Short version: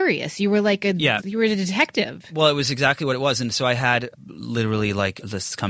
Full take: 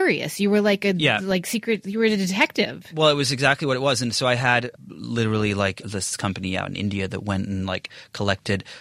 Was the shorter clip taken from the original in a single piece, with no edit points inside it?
no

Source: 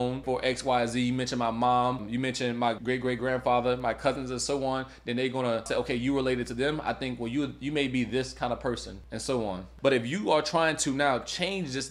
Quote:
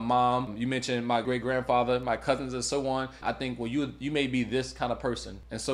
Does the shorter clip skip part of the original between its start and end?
yes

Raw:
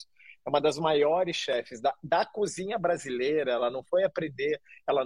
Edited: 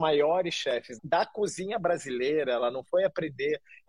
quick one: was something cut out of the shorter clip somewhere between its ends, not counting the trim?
yes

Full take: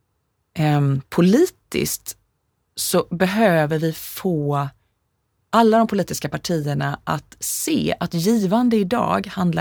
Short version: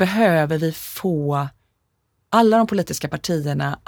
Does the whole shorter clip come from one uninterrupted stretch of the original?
yes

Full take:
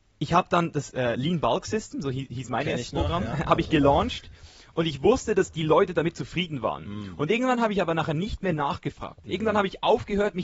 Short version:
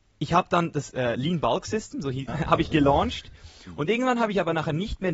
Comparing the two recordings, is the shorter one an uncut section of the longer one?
no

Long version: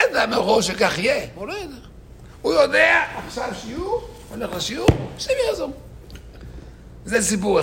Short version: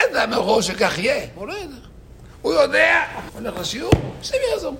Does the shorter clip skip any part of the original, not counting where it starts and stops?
yes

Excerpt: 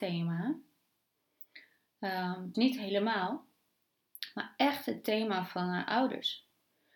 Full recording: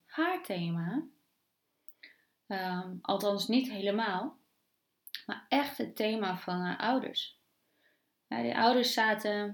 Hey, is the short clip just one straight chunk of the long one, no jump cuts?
no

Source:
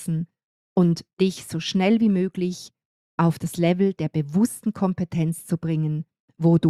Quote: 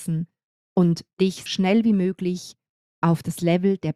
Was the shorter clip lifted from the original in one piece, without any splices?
no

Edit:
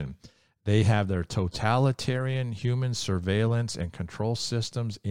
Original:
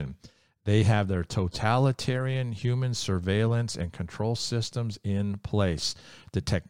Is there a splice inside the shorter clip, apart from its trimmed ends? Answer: no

